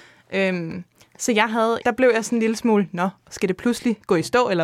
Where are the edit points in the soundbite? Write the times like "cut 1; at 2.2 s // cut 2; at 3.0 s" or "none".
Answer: cut 1; at 1.8 s